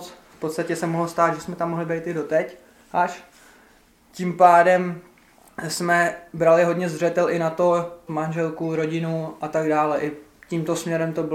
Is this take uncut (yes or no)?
no